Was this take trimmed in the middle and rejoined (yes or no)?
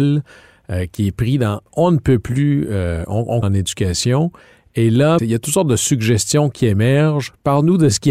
yes